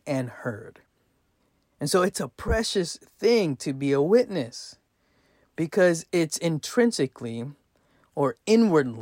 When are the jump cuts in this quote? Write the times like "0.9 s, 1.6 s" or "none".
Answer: none